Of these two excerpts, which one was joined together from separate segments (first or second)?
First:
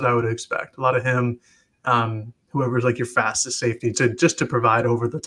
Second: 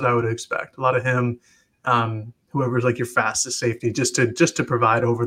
first